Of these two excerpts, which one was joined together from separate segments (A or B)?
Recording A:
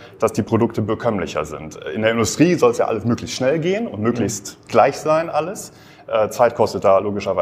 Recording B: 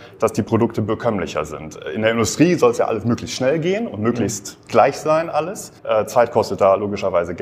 B